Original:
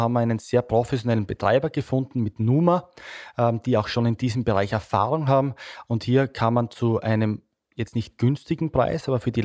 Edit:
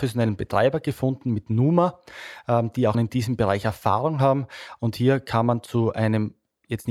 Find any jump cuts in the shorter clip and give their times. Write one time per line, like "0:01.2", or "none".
0:02.9